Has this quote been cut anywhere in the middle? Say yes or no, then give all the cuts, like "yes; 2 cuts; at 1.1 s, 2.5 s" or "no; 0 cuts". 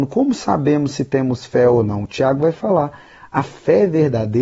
no; 0 cuts